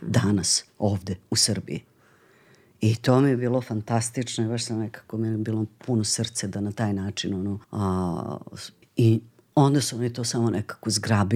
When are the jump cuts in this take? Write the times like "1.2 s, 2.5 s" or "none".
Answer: 7.6 s, 8.8 s